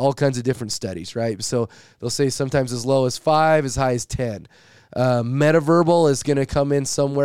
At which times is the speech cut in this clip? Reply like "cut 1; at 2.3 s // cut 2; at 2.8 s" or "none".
none